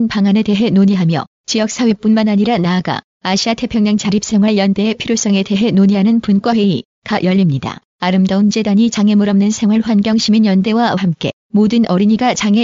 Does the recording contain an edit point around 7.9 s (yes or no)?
yes